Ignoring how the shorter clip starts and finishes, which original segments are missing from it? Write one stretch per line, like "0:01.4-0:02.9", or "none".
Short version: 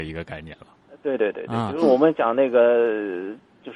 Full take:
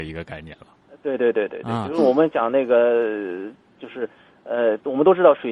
0:01.2-0:01.3

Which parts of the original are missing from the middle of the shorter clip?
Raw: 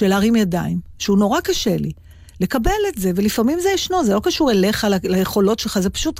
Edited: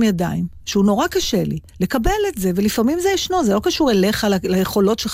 0:02.0-0:02.3

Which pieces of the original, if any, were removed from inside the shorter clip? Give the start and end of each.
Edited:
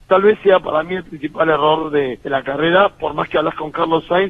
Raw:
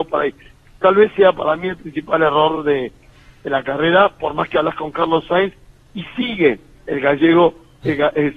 0:02.9-0:03.4

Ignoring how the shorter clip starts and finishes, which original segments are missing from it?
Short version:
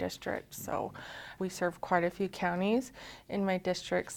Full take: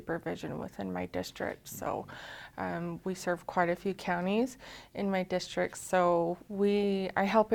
0:02.5-0:03.0

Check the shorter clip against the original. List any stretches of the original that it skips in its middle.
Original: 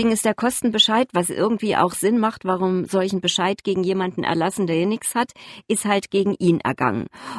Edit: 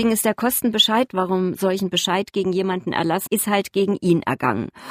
0:01.1-0:02.4
0:04.6-0:05.6

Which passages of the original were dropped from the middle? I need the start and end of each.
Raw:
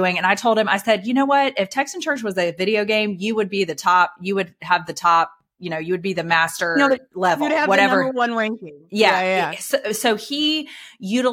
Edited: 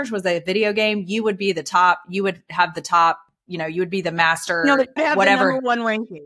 0:07.1-0:07.5

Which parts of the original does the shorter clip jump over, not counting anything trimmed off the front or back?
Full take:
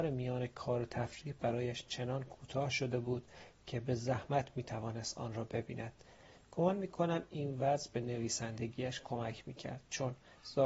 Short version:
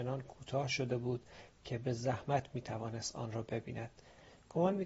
none

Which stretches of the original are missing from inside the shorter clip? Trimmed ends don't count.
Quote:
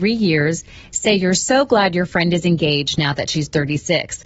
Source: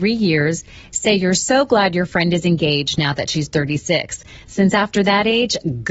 none

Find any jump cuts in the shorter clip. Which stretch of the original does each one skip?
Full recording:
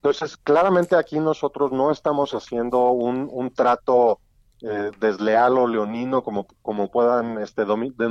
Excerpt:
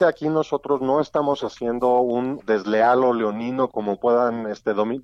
0:03.3-0:04.9
0:06.2-0:06.6

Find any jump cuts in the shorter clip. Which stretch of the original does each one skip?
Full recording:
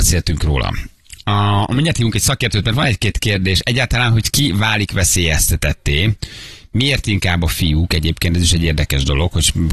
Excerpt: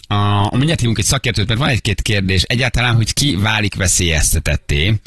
none

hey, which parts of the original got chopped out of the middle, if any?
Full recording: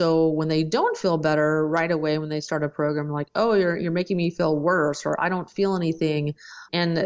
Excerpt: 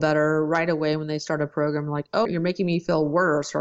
0:03.5-0:03.8

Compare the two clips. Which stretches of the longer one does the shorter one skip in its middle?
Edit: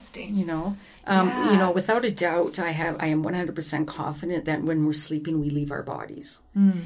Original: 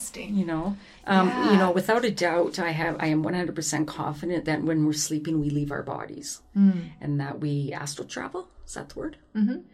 none

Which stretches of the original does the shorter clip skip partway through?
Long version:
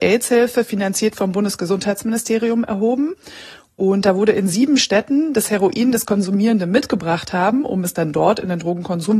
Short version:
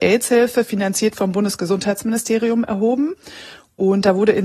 none

